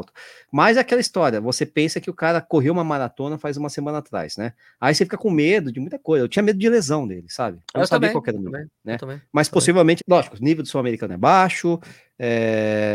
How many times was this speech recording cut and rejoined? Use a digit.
1